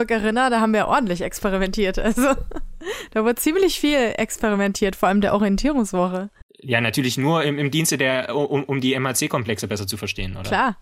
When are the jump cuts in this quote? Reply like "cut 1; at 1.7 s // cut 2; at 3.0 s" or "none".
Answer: cut 1; at 6.5 s